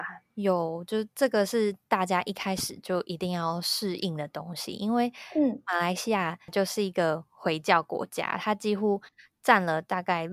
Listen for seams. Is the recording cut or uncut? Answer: uncut